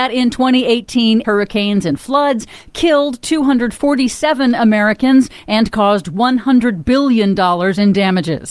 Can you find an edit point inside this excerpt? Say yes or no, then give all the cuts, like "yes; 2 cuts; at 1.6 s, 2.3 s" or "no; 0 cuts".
yes; 1 cut; at 1.2 s